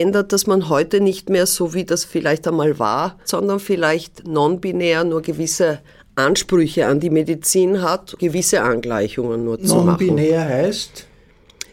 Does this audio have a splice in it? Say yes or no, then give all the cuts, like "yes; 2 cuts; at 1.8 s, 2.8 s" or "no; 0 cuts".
yes; 2 cuts; at 3.2 s, 8.2 s